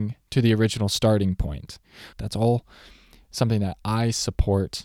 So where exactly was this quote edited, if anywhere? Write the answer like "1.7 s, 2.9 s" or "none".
2.1 s